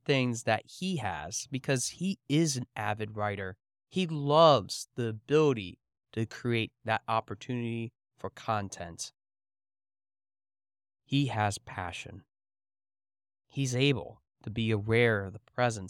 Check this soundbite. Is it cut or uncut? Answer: uncut